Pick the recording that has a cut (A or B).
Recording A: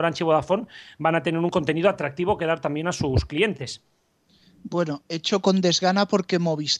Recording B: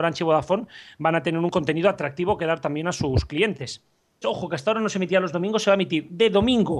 B